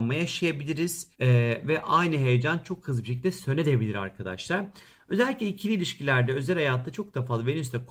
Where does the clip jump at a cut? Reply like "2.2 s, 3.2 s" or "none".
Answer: 1.1 s